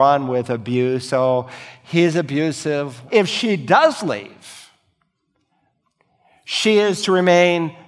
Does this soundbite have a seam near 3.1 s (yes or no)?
yes